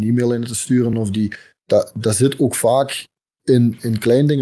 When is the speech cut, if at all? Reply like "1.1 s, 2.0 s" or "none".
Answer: none